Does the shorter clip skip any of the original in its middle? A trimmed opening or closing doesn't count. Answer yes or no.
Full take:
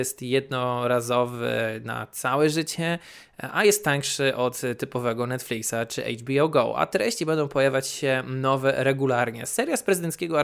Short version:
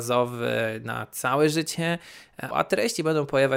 yes